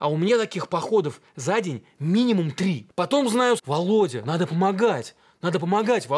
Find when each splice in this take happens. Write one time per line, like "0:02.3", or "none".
0:03.6